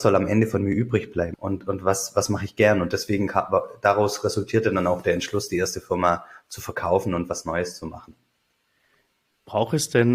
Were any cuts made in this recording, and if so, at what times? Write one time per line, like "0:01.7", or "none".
0:01.3